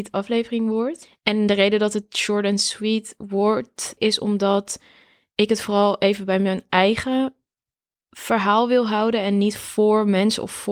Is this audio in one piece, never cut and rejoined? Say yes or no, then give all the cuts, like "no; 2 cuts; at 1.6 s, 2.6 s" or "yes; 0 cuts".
no; 1 cut; at 4.0 s